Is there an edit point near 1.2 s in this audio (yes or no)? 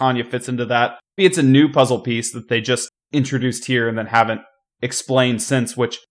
yes